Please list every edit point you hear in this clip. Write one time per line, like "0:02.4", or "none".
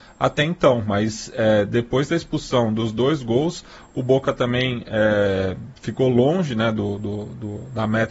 none